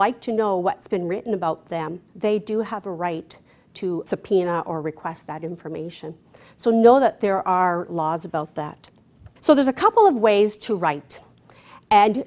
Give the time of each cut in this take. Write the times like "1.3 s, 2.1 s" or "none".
9.4 s